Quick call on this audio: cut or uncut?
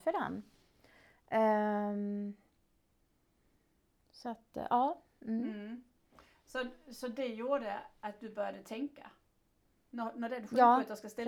uncut